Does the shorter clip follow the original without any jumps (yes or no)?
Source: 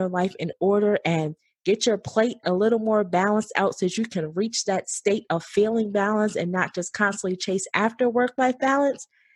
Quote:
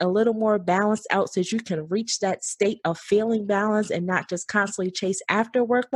yes